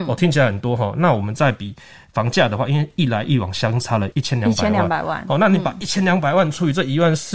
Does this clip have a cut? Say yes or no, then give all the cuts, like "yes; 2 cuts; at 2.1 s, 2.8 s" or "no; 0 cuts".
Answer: yes; 1 cut; at 4.1 s